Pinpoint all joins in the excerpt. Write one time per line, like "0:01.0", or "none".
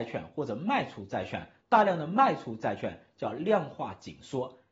0:01.6